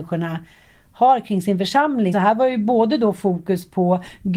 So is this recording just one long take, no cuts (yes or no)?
no